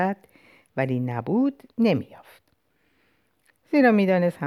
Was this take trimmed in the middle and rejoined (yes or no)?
yes